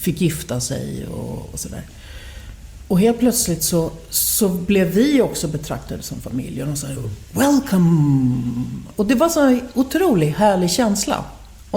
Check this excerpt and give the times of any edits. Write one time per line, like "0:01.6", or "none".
0:08.9